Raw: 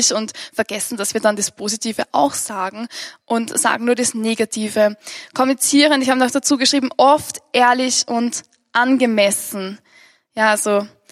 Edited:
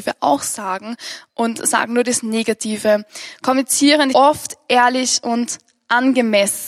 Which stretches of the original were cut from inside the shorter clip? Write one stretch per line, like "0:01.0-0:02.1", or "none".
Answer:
0:06.0-0:07.0